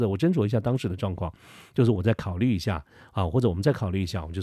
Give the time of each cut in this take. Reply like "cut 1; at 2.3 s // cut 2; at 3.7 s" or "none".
none